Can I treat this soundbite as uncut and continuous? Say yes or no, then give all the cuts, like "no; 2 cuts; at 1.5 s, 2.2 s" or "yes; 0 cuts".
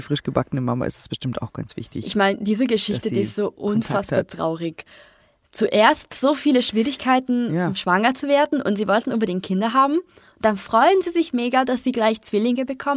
yes; 0 cuts